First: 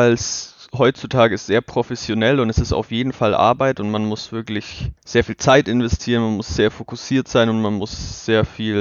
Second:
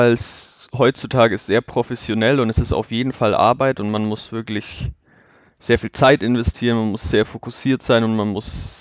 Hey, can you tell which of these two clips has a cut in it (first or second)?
first